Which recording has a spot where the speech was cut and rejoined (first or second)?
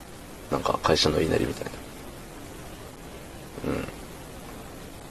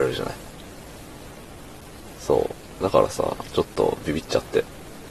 first